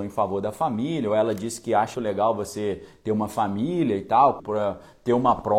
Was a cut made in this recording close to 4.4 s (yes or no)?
yes